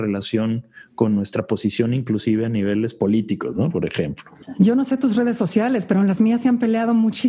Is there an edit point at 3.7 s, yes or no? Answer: no